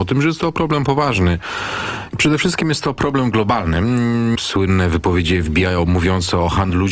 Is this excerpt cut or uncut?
cut